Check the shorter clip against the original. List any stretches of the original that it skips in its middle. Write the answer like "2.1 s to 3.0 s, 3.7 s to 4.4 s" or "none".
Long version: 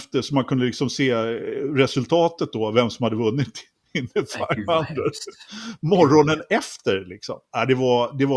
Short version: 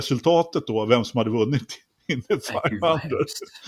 none